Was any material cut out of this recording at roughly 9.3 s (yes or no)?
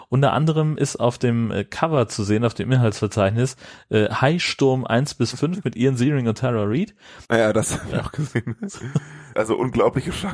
yes